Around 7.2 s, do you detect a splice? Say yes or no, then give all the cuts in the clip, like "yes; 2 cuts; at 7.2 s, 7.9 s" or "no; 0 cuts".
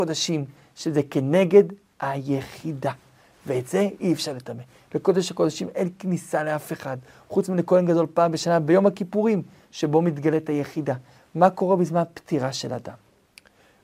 no; 1 cut; at 11.2 s